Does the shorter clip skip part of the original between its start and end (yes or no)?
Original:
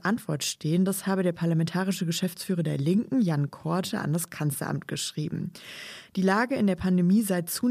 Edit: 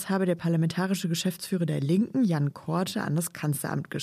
no